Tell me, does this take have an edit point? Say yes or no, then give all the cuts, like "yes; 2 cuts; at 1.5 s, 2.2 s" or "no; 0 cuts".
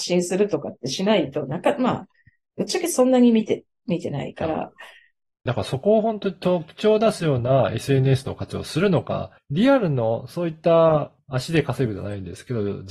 yes; 3 cuts; at 5.5 s, 9.4 s, 11.2 s